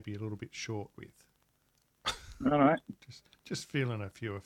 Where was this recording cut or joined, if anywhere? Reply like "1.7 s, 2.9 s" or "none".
none